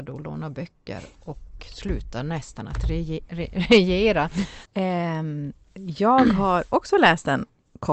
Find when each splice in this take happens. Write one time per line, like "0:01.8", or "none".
0:04.7